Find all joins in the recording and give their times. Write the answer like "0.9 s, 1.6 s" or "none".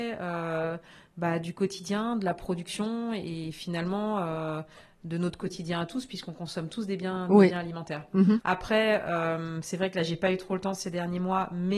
8.4 s